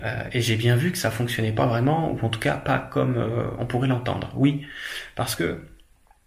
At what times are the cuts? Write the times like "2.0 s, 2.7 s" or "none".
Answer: none